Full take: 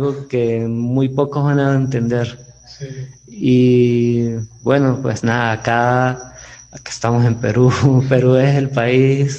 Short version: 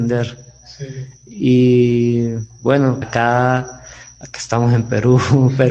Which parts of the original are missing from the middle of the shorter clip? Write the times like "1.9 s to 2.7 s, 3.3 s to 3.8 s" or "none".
5.0 s to 5.5 s